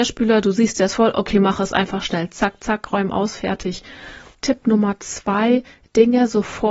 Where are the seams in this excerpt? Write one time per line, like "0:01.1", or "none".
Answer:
0:04.3